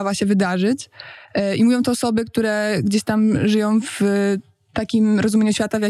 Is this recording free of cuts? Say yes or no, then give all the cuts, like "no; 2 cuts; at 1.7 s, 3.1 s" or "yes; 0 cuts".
yes; 0 cuts